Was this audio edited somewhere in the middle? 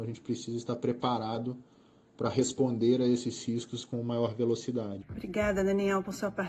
yes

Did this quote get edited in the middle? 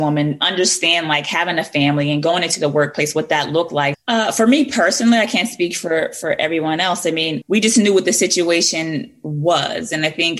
yes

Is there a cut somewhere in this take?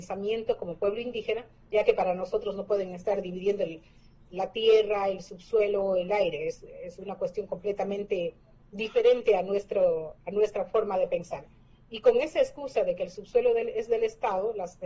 no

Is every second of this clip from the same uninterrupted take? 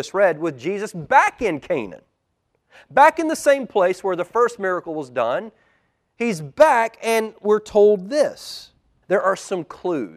no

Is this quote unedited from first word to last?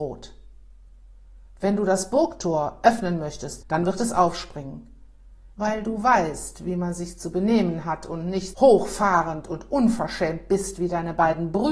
no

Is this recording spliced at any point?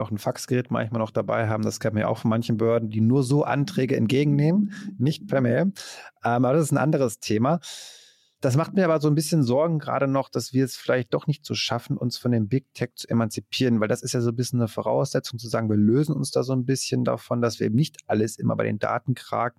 no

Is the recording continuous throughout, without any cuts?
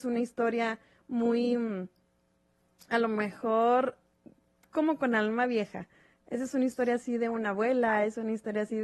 yes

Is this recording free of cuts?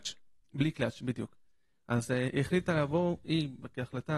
yes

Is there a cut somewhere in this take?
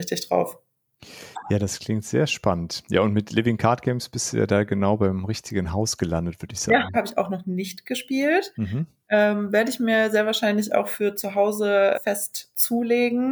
yes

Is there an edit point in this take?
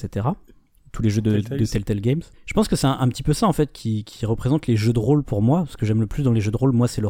yes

